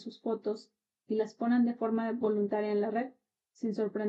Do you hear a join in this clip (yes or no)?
no